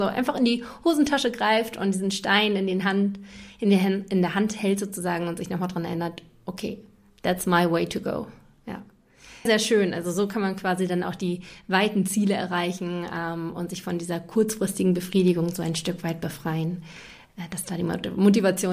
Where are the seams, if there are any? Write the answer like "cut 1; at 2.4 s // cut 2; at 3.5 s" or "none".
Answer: cut 1; at 9.5 s